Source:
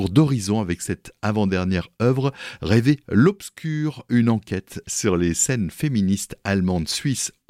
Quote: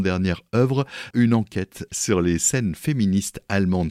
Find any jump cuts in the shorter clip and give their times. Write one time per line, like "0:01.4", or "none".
0:01.1